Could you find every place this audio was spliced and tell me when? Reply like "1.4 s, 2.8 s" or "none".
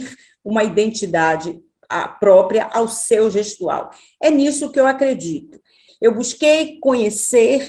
5.9 s